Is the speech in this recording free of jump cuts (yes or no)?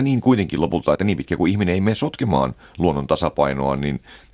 yes